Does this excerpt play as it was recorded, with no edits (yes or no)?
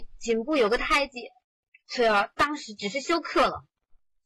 no